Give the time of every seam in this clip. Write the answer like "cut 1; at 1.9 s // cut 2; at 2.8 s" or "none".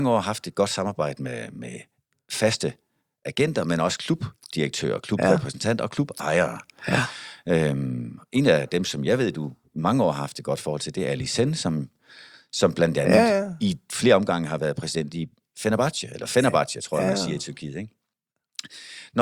none